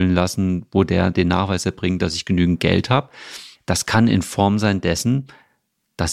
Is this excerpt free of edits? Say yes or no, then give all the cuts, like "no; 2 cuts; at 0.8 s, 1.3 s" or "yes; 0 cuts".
no; 1 cut; at 3.6 s